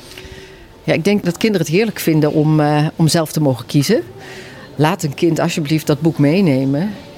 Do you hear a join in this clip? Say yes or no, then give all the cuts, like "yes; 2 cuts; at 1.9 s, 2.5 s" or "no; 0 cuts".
no; 0 cuts